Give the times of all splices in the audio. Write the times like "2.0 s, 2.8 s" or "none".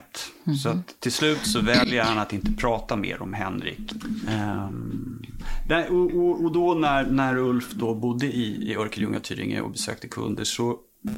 none